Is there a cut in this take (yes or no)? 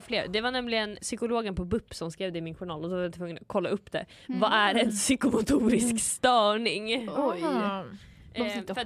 yes